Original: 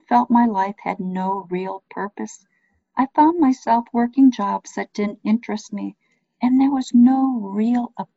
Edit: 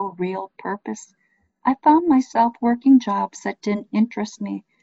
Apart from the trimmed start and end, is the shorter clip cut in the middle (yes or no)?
no